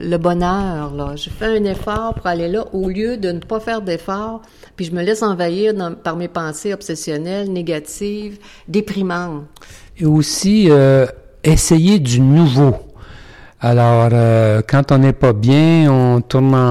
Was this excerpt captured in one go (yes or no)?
yes